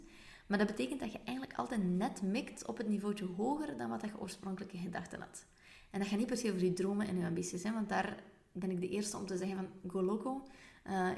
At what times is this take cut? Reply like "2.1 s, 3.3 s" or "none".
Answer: none